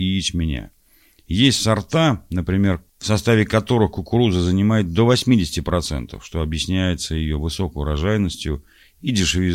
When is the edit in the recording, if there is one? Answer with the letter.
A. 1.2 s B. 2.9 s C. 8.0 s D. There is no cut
B